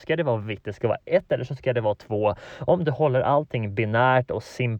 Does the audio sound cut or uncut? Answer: uncut